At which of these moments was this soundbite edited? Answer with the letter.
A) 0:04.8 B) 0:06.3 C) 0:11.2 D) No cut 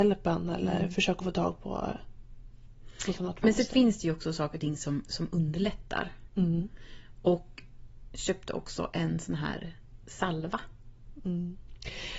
B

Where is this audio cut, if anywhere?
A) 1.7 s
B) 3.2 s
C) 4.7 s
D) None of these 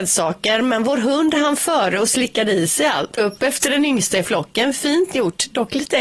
B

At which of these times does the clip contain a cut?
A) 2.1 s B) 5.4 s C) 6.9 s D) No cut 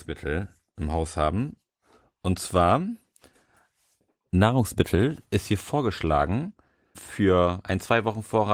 C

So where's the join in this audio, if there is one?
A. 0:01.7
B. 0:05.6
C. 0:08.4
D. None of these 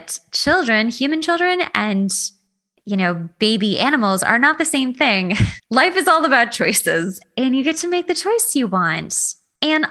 B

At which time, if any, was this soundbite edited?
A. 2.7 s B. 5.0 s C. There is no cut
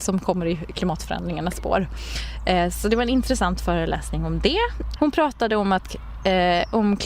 B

